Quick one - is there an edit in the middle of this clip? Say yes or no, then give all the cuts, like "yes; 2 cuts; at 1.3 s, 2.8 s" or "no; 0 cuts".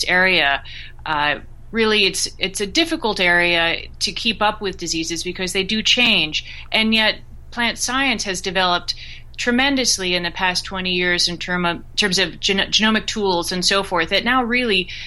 no; 0 cuts